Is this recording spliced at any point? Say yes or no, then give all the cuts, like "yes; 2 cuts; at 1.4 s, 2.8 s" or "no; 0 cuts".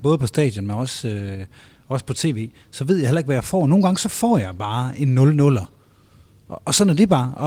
no; 0 cuts